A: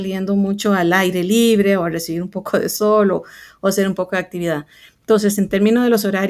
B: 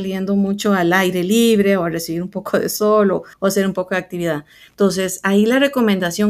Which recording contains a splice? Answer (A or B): B